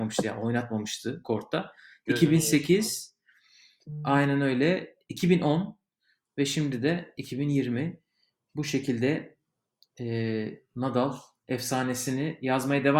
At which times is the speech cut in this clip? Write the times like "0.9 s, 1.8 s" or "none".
5.1 s